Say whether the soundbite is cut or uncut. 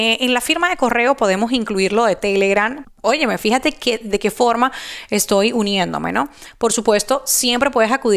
cut